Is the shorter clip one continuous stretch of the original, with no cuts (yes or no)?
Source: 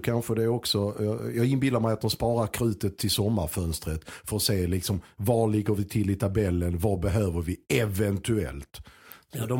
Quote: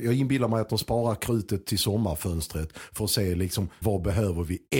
no